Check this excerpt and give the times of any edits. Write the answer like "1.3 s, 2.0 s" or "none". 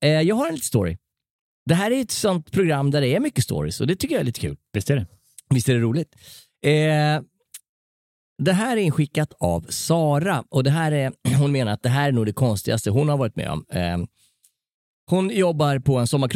none